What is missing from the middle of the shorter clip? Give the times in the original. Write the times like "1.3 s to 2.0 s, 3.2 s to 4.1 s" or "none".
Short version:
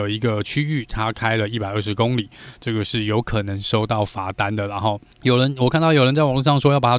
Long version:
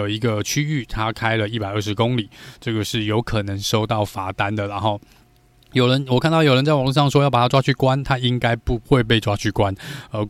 5.1 s to 5.6 s

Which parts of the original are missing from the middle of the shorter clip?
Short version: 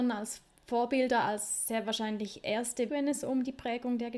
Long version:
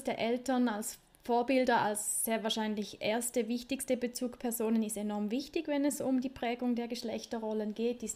3.5 s to 5.7 s

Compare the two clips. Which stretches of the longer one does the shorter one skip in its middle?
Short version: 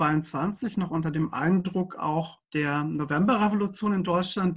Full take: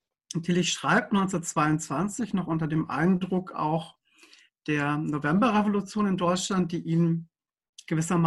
4.0 s to 4.6 s

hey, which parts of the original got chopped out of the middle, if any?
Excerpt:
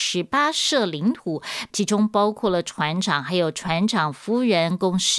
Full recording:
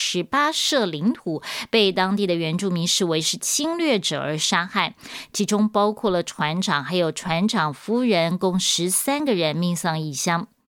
1.7 s to 5.3 s

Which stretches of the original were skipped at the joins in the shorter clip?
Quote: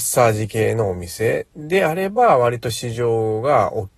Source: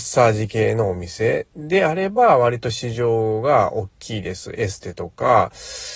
none

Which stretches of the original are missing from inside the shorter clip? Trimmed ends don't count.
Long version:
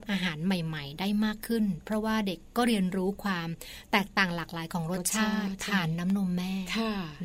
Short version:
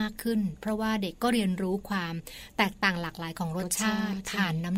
2.4 s to 2.5 s

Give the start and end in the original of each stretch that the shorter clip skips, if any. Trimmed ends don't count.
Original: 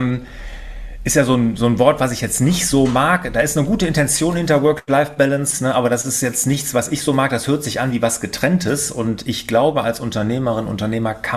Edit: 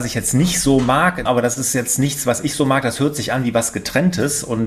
3.3 s to 5.7 s

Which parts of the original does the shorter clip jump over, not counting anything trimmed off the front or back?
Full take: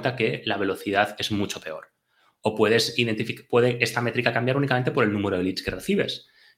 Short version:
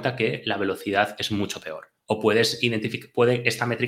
2.0 s to 2.4 s

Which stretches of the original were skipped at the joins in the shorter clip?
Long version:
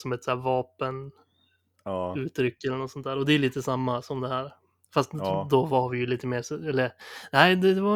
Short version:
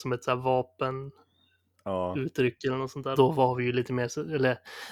3.1 s to 5.5 s

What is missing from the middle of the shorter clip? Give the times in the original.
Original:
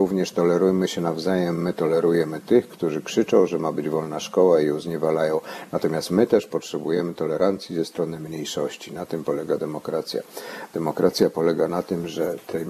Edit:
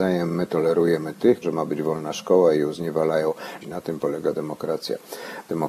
2.7 s to 3.5 s, 5.7 s to 8.9 s

